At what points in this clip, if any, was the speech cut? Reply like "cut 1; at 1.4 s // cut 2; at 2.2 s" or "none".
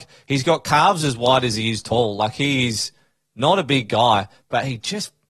none

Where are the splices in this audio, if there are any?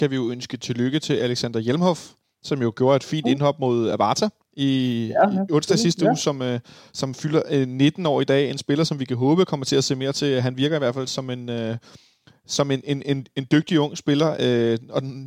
none

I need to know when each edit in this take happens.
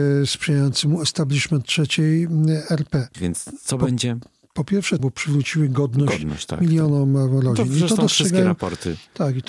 cut 1; at 3.1 s // cut 2; at 5.0 s

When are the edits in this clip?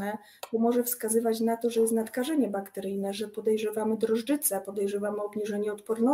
none

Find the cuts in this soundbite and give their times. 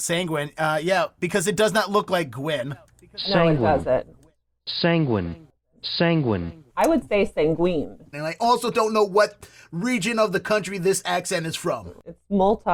cut 1; at 6.7 s // cut 2; at 8.1 s

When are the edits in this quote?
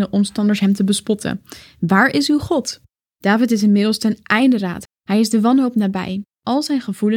cut 1; at 3.1 s // cut 2; at 4.8 s

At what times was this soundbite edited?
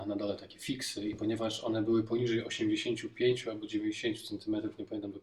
none

